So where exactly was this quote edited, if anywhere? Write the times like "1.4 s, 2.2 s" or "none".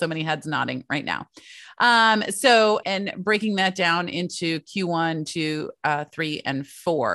2.8 s

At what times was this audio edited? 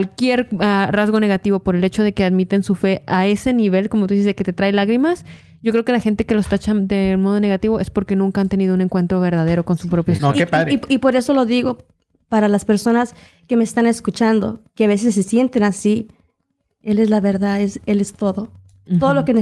10.2 s

